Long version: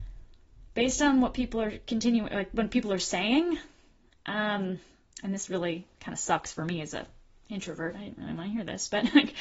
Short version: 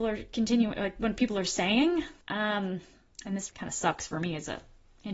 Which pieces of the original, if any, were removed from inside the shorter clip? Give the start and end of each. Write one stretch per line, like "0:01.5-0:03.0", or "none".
0:03.8-0:04.2
0:05.5-0:05.9